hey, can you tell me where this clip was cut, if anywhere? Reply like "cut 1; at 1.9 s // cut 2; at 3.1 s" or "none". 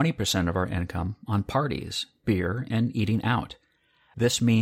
none